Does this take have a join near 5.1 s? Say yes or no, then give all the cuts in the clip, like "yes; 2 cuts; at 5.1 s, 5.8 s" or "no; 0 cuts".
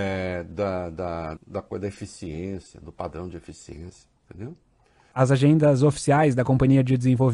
yes; 2 cuts; at 1.4 s, 5.1 s